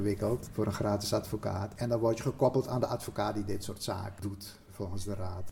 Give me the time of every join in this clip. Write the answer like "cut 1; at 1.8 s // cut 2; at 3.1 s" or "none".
none